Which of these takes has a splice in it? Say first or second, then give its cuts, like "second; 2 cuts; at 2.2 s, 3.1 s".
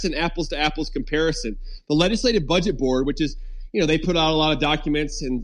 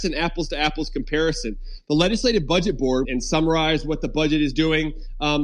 second; 1 cut; at 3.0 s